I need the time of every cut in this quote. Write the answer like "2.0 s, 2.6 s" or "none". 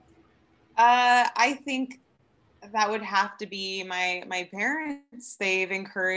none